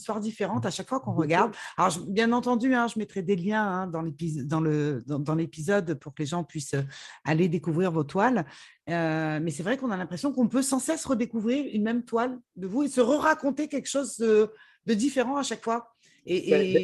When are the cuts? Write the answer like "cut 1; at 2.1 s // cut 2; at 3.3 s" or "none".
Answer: none